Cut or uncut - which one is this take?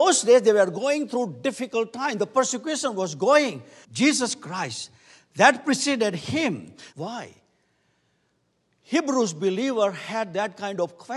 cut